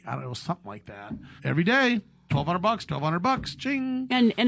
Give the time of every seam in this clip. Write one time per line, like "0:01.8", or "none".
0:01.4
0:02.9